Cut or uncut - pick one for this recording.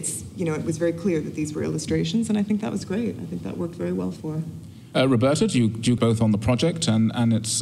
cut